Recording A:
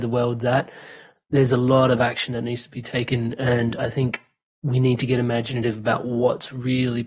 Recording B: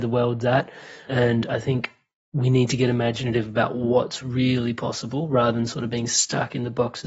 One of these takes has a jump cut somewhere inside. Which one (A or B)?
B